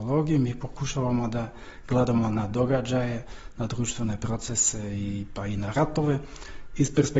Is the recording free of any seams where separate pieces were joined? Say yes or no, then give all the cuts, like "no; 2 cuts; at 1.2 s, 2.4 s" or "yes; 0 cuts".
yes; 0 cuts